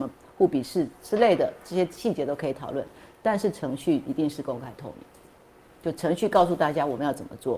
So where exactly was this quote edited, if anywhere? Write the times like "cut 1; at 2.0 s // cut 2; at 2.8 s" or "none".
none